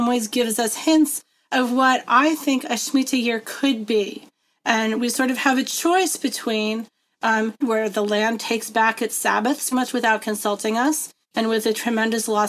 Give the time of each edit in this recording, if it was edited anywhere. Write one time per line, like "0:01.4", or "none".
0:07.6
0:09.7
0:11.2